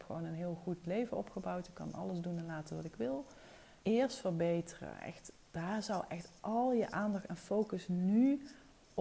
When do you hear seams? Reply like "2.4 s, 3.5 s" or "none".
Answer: 3.8 s